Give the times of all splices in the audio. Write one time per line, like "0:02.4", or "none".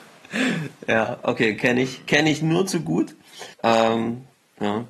0:03.5